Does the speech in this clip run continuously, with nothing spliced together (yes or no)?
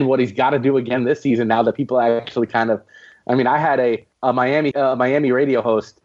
no